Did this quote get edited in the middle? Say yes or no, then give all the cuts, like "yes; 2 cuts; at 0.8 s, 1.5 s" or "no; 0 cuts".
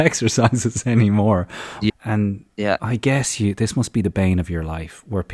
yes; 1 cut; at 1.9 s